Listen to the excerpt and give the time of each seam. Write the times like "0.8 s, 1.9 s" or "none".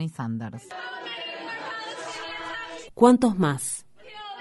2.9 s